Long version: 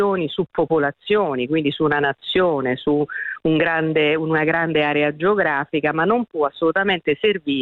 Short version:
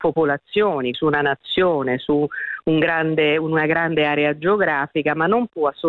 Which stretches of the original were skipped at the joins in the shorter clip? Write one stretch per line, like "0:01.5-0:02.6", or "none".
0:01.5-0:01.7